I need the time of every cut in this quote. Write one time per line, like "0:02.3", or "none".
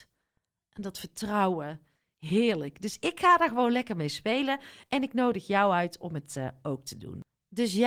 none